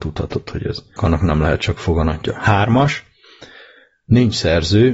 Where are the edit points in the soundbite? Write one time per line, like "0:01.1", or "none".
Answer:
0:01.0